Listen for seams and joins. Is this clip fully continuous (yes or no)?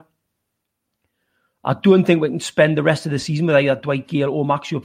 yes